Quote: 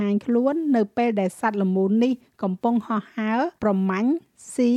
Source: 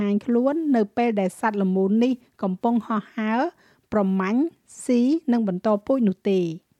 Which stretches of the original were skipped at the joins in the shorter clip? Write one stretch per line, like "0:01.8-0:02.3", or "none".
0:03.6-0:03.9